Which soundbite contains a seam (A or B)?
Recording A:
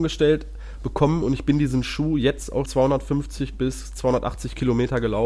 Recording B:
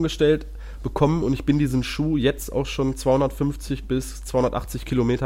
A